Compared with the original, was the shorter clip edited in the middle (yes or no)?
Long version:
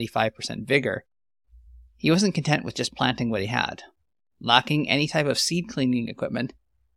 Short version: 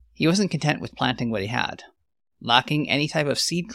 yes